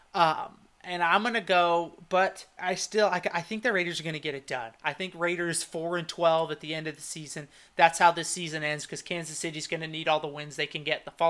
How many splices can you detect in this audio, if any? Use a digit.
1